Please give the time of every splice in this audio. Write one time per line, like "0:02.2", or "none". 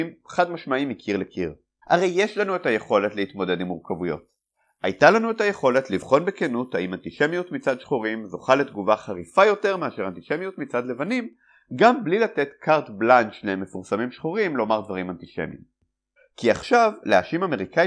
0:01.8
0:16.2